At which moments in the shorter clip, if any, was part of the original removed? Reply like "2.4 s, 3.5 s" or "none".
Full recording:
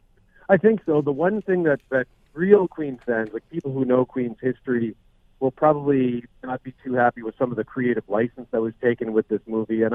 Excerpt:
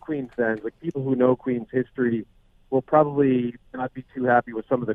none